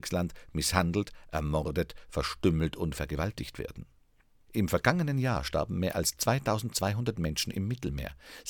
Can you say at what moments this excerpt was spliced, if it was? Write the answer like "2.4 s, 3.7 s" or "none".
4.5 s